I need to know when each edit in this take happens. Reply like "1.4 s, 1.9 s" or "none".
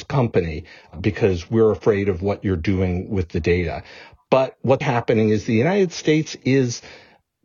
4.8 s